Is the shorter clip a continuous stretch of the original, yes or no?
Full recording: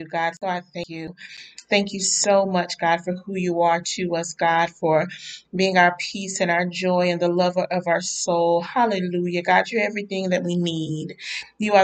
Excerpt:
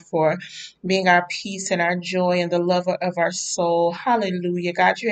yes